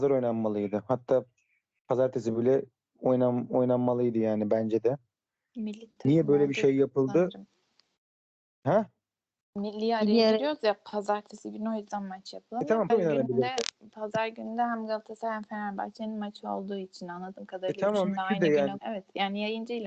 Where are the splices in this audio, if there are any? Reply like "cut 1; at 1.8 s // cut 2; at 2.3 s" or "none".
cut 1; at 12.9 s // cut 2; at 18.8 s